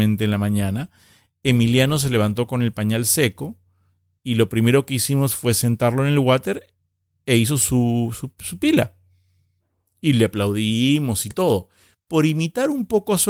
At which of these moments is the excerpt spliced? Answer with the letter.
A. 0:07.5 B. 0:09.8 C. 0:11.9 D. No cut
C